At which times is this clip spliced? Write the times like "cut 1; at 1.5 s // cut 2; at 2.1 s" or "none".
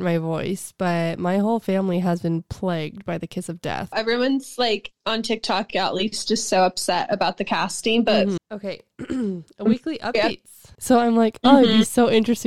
cut 1; at 3.9 s // cut 2; at 8.4 s // cut 3; at 10.7 s